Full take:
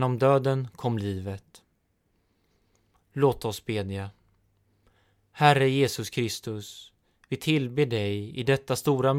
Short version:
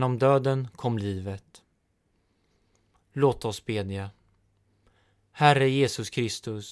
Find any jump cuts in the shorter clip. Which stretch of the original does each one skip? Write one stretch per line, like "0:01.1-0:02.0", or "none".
none

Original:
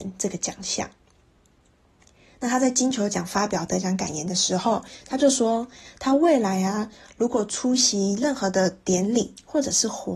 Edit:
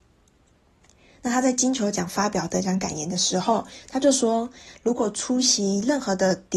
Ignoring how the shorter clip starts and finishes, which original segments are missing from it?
0:05.9-0:07.1

